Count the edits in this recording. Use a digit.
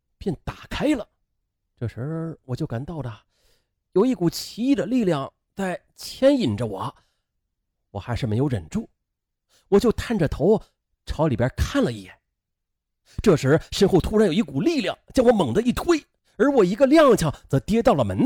0